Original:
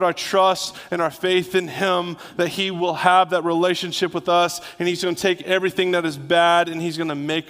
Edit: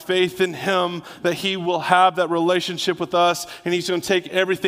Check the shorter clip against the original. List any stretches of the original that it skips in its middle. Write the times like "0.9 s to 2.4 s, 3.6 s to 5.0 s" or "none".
none